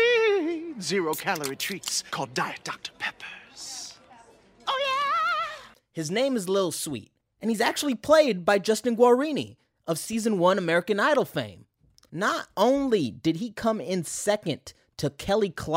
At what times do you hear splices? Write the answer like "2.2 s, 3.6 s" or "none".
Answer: 12.1 s